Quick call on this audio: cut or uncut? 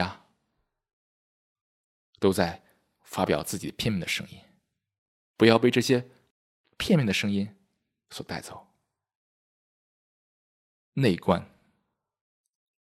cut